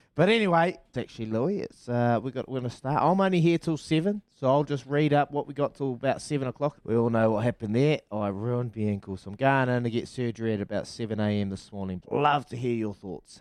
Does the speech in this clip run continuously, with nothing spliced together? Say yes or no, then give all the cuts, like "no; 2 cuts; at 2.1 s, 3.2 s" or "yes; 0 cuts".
no; 3 cuts; at 0.9 s, 6.8 s, 12.0 s